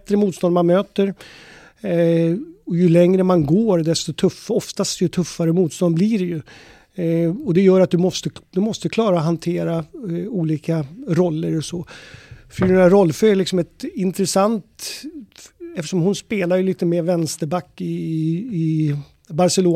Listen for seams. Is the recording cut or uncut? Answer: uncut